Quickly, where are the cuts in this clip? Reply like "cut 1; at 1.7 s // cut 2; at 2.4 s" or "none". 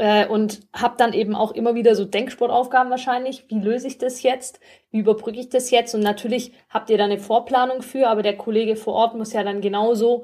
none